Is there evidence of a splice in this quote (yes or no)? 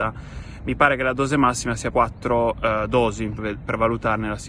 yes